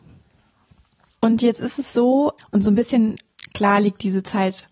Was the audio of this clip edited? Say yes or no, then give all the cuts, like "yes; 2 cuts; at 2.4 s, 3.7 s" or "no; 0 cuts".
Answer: yes; 2 cuts; at 1.1 s, 2.4 s